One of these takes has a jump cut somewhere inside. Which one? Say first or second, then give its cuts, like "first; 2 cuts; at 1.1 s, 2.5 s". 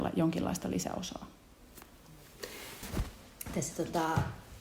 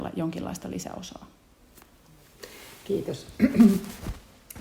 first; 1 cut; at 2.8 s